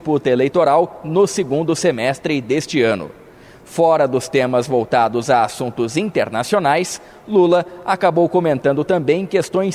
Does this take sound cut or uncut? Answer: uncut